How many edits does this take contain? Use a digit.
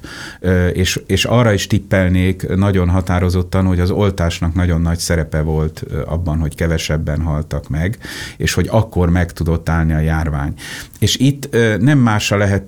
0